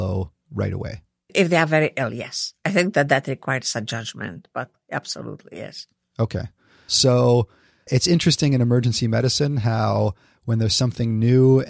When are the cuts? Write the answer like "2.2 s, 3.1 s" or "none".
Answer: 6.9 s